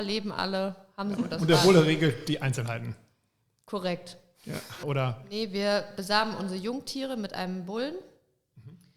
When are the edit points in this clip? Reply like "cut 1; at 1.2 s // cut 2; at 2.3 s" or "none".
cut 1; at 1.2 s // cut 2; at 4.8 s